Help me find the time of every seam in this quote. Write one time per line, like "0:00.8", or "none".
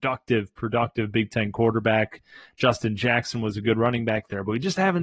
none